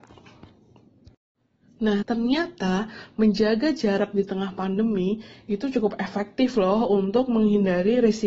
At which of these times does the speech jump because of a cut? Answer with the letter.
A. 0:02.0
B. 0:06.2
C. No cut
A